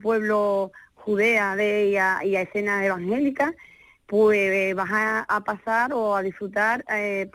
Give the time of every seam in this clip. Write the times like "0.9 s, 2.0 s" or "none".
5.3 s